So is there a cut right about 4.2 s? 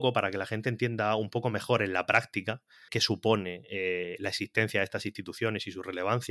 no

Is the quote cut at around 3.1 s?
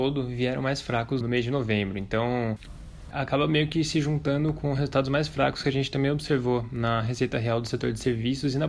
yes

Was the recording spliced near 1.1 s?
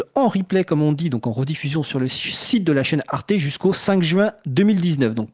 no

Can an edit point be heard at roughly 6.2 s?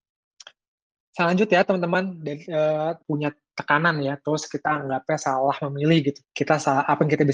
yes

